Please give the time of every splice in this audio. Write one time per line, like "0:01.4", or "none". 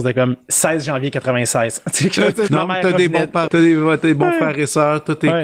0:02.5
0:03.5